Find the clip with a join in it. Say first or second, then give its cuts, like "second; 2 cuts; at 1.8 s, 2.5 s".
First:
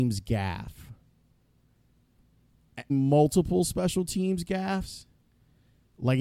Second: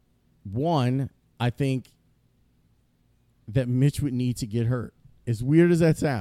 first; 1 cut; at 2.9 s